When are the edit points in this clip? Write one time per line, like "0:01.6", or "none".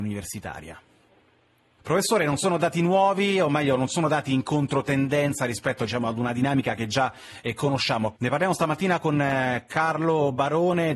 0:01.8
0:08.2